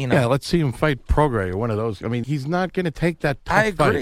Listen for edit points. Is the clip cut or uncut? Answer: cut